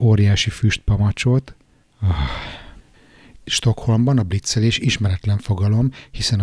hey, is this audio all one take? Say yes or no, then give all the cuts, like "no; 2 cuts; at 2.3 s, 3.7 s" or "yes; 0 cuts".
yes; 0 cuts